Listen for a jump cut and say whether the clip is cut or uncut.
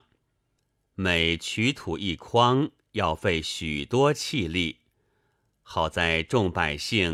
uncut